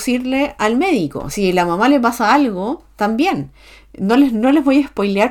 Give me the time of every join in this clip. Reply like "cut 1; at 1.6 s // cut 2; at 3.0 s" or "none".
none